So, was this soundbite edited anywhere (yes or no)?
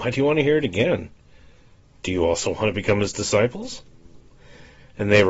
no